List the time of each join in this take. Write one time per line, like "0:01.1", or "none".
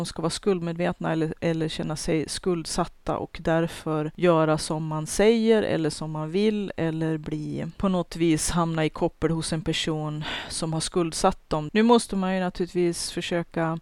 0:11.7